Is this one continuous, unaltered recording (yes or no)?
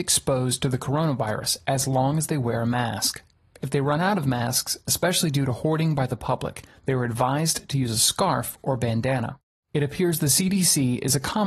yes